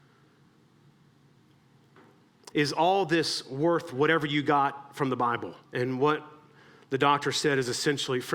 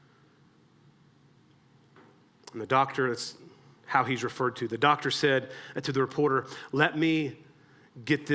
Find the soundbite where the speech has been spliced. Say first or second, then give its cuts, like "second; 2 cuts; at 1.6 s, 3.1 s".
first; 2 cuts; at 2.5 s, 5.6 s